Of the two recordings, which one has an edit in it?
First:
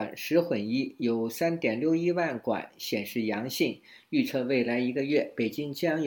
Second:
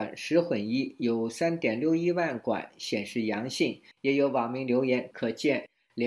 second; 2 cuts; at 3.9 s, 5.1 s

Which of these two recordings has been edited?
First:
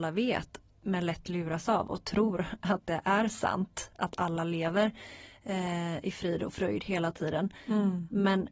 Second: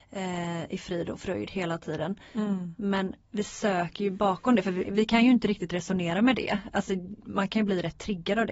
second; 1 cut; at 4.8 s

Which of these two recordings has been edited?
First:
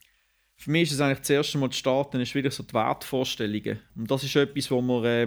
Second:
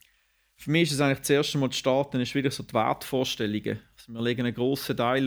first; 1 cut; at 3.9 s

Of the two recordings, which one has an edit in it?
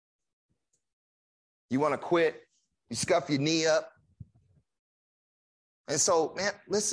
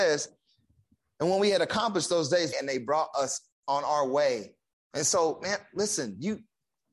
second; 2 cuts; at 2.5 s, 4.7 s

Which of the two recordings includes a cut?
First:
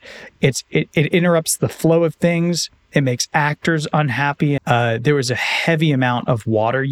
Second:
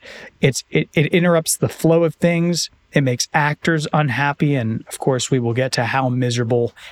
first; 1 cut; at 4.6 s

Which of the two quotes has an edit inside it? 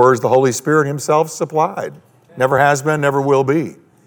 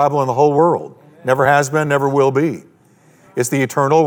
first; 1 cut; at 2.3 s

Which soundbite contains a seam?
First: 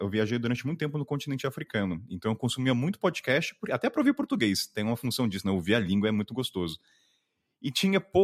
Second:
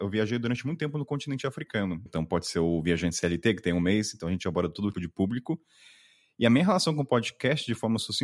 second; 2 cuts; at 2.1 s, 4.9 s

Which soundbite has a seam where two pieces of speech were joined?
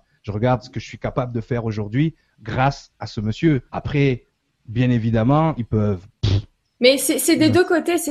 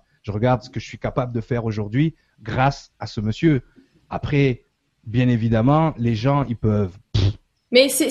first; 2 cuts; at 3.7 s, 5.6 s

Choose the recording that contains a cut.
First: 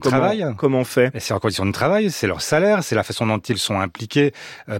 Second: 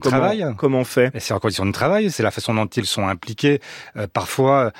second; 1 cut; at 2.1 s

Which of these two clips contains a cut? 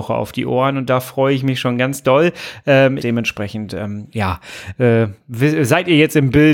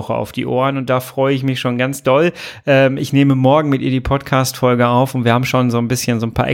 first; 1 cut; at 3.0 s

